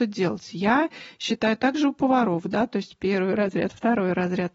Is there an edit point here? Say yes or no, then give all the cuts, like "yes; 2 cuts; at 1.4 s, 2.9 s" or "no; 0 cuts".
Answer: no; 0 cuts